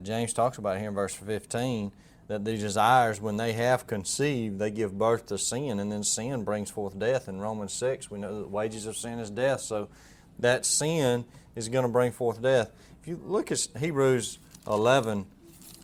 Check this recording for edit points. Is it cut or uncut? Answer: uncut